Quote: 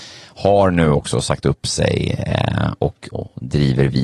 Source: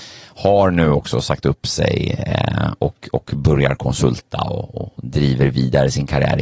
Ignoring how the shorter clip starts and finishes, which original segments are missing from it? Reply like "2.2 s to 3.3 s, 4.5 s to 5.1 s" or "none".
3.1 s to 4.7 s